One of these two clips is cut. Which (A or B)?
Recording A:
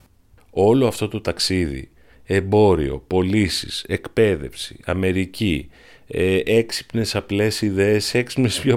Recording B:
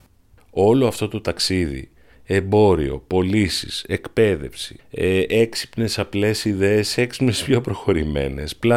B